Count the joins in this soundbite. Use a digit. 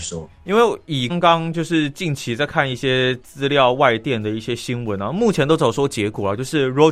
1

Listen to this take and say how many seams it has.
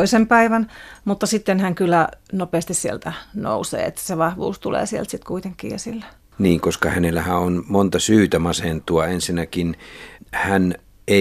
0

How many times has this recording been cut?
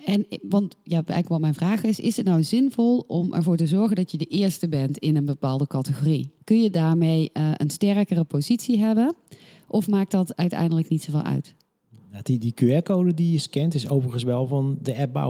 1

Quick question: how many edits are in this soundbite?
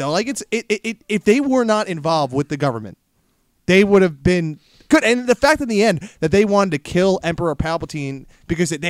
0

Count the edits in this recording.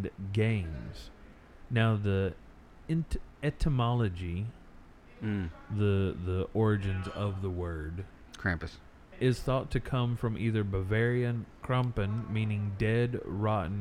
1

